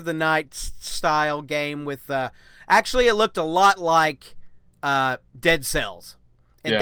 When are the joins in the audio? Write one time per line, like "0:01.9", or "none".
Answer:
none